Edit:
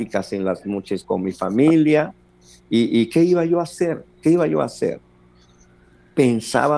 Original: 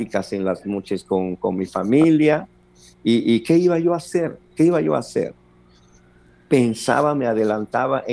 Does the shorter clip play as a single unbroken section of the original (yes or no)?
no